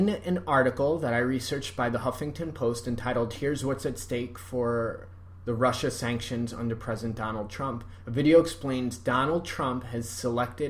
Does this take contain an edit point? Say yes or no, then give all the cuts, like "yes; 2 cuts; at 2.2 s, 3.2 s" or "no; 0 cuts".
no; 0 cuts